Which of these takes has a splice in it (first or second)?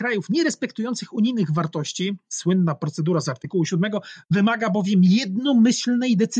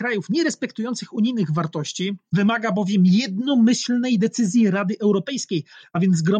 second